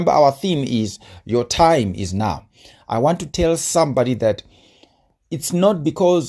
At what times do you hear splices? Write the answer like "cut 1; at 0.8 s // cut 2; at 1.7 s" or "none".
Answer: none